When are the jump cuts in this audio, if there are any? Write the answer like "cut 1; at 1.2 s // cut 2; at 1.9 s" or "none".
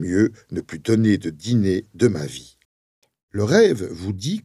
none